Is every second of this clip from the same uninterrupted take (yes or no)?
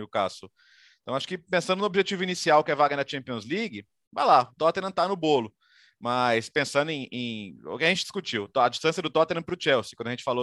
yes